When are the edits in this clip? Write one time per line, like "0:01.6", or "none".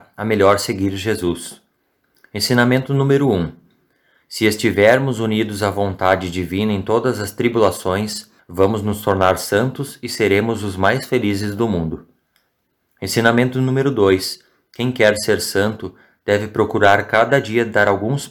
0:08.4